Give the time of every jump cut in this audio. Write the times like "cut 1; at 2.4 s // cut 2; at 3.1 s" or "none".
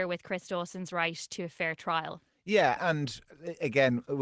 cut 1; at 2.8 s